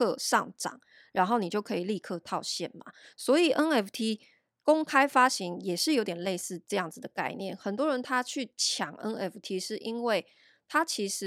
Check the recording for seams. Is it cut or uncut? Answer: uncut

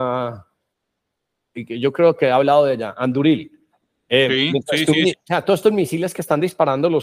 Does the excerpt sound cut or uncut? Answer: cut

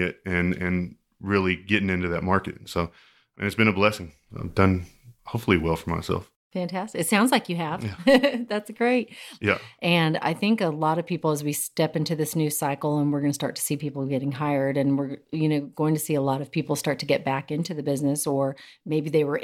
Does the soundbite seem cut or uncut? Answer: cut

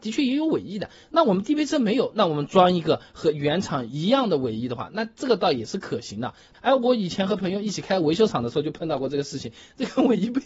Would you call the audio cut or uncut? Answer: cut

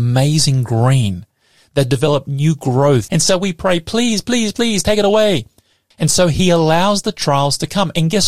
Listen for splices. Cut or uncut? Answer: cut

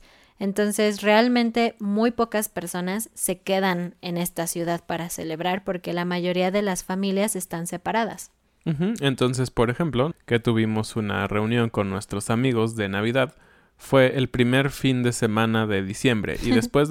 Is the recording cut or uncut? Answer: cut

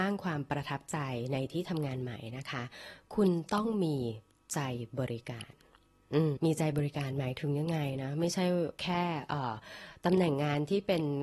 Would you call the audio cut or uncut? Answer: cut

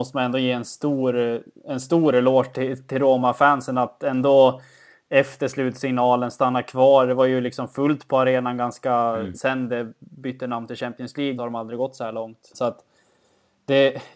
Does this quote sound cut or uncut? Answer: cut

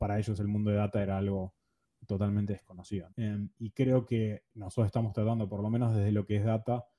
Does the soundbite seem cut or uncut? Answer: cut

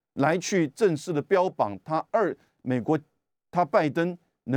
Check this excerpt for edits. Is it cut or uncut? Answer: uncut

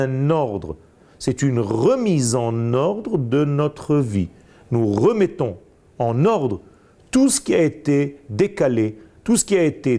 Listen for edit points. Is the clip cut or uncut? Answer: uncut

